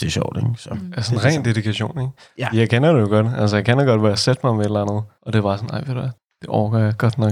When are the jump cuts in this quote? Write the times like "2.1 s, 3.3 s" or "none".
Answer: none